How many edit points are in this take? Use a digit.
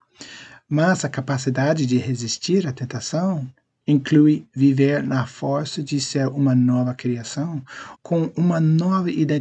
2